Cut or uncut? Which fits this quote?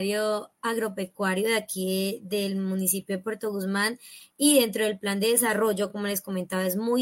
uncut